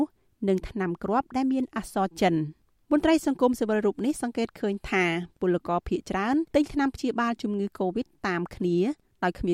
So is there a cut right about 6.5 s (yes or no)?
yes